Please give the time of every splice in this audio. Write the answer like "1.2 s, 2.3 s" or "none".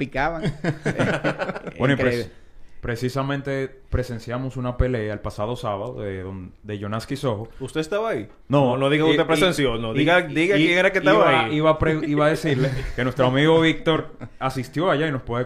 8.4 s